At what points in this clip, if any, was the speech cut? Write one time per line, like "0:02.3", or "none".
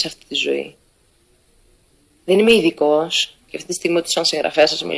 0:02.2
0:03.5